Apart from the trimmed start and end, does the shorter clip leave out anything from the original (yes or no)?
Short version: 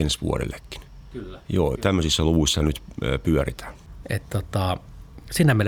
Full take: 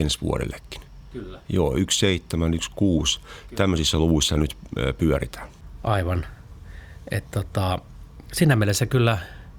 yes